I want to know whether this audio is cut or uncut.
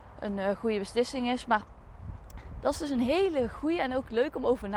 cut